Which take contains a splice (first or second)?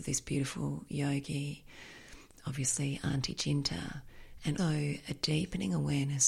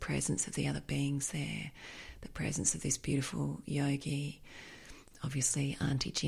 first